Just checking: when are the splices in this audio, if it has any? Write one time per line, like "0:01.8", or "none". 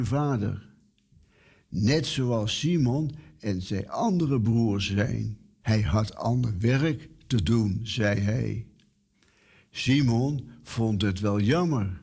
0:05.6

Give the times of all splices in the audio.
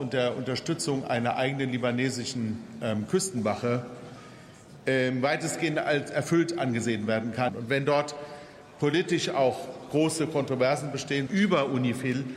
0:07.5
0:11.3

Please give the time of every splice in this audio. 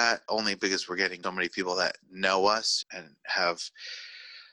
0:01.2
0:02.8

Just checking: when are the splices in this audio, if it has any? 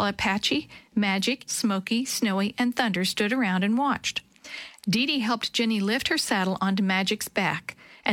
0:01.5
0:04.8

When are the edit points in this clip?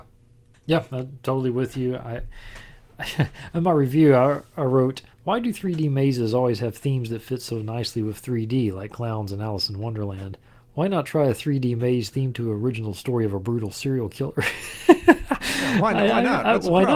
none

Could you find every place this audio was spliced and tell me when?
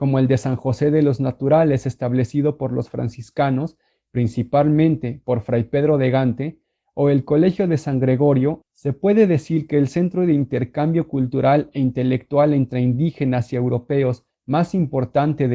0:08.6

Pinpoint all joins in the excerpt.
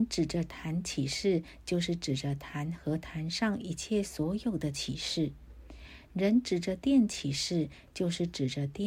none

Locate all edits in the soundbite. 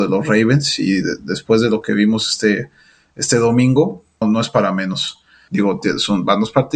0:04.2
0:05.5

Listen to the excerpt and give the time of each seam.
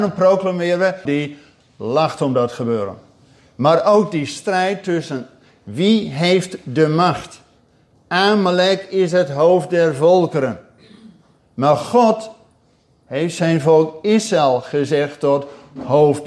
0:01.1

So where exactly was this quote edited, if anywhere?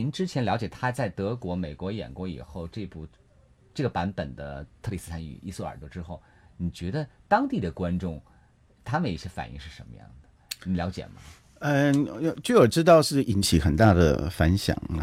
none

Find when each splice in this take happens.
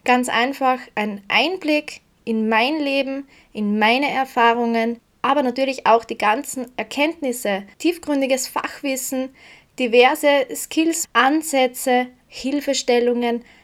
0:07.7
0:11.0
0:12.2

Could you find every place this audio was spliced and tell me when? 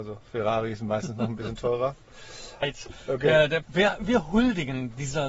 0:02.6
0:03.6

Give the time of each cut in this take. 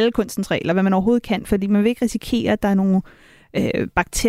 none

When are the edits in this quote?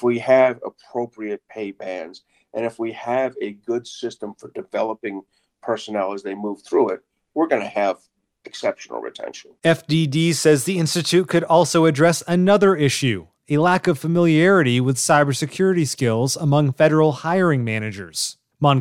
none

